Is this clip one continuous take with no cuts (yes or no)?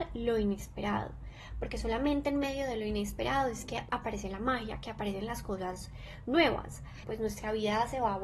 no